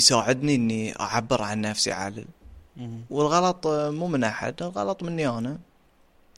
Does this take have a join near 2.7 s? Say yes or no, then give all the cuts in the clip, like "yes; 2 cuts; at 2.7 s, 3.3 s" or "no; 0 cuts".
yes; 1 cut; at 2.7 s